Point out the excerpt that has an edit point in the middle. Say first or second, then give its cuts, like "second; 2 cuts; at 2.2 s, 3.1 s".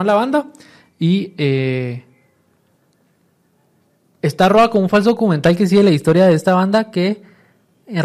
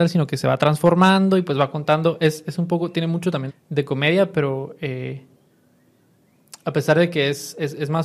second; 1 cut; at 3.5 s